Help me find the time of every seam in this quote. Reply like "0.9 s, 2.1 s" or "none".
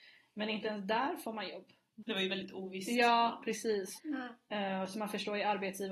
2.0 s, 4.0 s